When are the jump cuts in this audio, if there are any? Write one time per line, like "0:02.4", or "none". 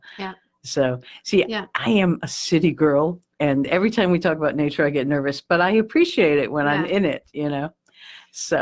none